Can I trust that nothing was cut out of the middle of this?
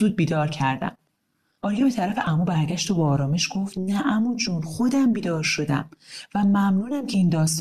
yes; 0 cuts

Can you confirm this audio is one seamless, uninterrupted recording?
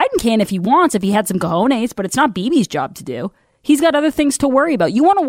yes; 0 cuts

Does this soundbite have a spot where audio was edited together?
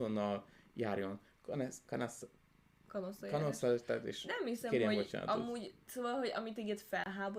no; 0 cuts

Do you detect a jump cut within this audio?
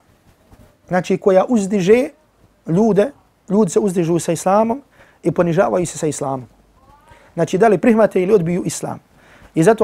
no; 0 cuts

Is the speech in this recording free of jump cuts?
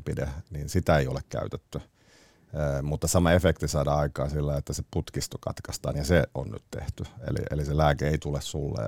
yes; 0 cuts

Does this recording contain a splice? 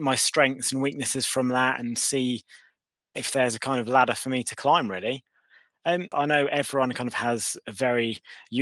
yes; 1 cut; at 6.1 s

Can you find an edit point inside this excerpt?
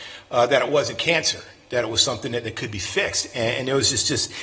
no; 0 cuts

